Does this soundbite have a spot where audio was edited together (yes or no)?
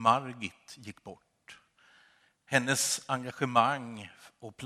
no